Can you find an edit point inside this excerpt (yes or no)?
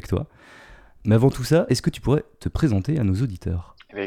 no